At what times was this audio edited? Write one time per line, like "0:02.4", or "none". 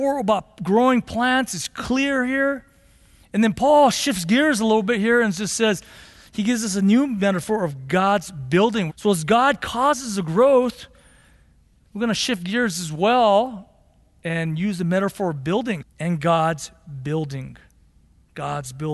0:08.9
0:15.8